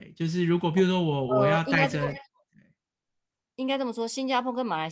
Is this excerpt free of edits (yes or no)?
yes